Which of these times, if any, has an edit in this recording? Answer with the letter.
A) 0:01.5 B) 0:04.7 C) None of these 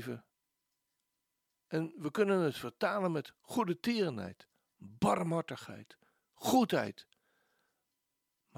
A